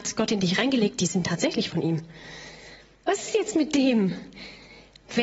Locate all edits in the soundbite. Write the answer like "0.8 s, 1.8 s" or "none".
3.0 s